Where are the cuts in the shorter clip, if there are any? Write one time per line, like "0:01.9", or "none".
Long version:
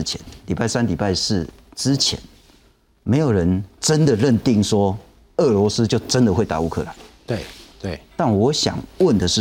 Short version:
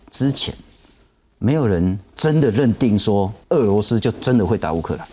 0:03.4

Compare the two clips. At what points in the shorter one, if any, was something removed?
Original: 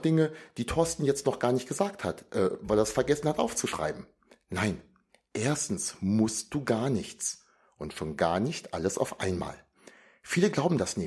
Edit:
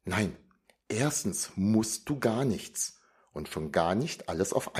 none

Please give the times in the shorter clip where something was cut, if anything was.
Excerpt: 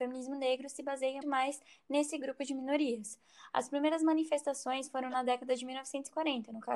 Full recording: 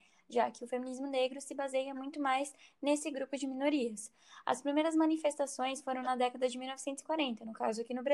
0:01.2

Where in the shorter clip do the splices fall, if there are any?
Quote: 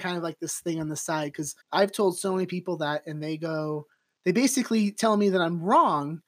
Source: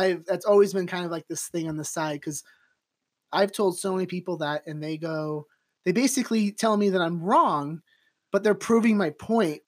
0:01.6

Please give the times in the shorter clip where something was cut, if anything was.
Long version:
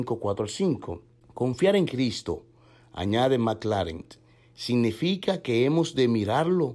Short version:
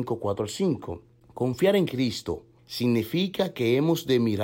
0:02.6

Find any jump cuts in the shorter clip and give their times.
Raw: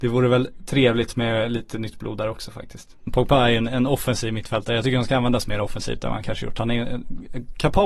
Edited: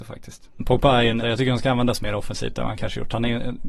0:01.2

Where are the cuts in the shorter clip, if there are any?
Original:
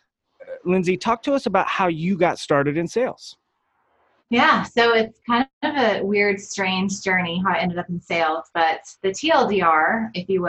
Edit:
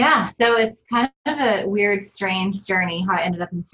none

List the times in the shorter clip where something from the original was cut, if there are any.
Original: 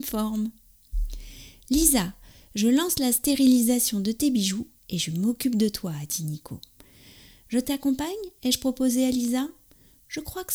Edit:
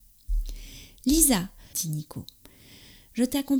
0:01.7

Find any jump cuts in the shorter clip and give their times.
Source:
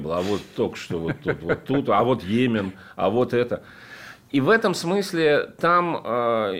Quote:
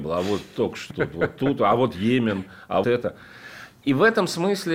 0:00.9
0:02.8

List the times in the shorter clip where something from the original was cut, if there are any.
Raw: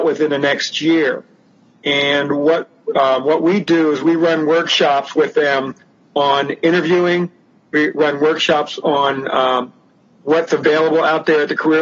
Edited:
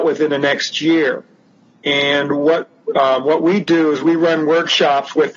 none

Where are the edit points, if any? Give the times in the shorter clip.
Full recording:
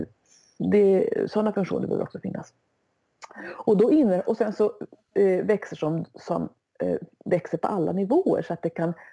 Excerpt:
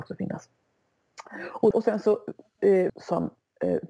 0:01.7
0:02.9

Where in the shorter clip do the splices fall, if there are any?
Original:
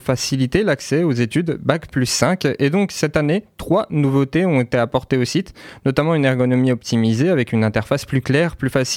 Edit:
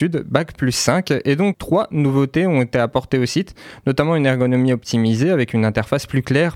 0:01.5

